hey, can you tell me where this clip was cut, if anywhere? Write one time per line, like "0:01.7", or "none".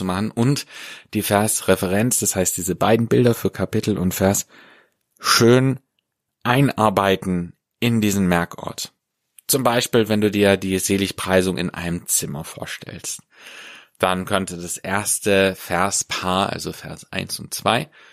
none